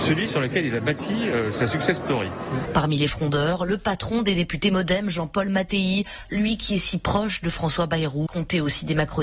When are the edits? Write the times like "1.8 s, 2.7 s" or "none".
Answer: 2.7 s, 6.2 s, 8.3 s